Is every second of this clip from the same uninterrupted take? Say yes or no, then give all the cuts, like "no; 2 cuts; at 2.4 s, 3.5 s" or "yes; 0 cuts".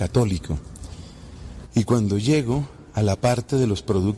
no; 1 cut; at 1.6 s